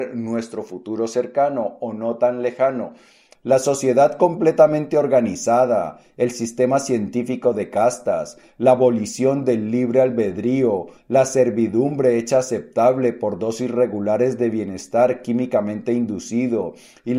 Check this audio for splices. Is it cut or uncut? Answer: cut